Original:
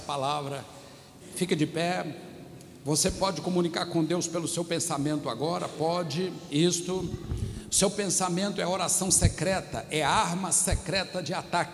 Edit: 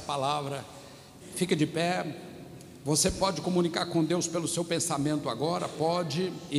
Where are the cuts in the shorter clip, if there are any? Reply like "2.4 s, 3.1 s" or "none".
none